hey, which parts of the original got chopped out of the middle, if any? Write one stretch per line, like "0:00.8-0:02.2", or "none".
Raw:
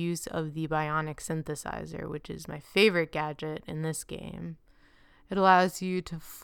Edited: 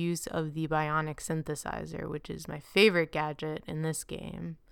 none